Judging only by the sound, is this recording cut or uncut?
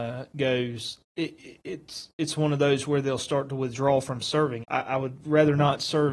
cut